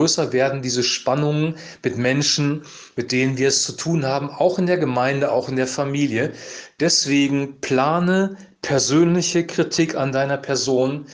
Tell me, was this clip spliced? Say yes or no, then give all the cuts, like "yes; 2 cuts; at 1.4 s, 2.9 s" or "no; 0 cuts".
no; 0 cuts